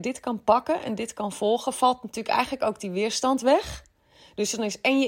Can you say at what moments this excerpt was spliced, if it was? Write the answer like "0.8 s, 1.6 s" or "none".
none